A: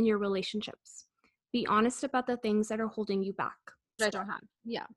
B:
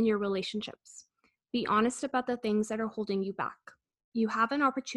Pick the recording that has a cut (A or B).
A